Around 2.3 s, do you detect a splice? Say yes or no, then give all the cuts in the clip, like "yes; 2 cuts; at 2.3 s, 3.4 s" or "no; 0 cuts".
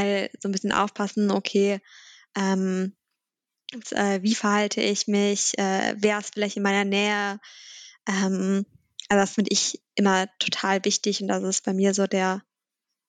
no; 2 cuts; at 3.8 s, 9.9 s